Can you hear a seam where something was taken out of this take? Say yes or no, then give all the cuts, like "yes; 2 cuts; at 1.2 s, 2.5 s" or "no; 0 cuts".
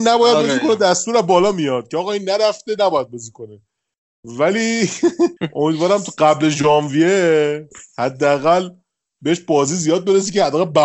yes; 1 cut; at 5.4 s